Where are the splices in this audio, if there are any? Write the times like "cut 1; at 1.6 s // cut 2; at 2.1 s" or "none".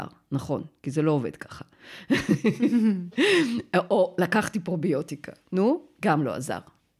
none